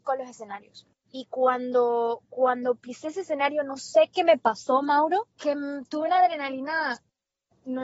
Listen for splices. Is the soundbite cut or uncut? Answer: cut